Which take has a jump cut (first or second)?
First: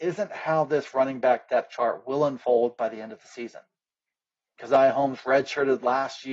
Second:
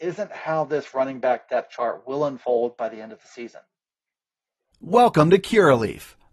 first